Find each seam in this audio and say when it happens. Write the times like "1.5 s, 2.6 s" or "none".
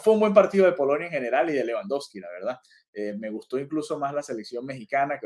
3.1 s